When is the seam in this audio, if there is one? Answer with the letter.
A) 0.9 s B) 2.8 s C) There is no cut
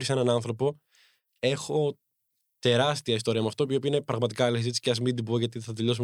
C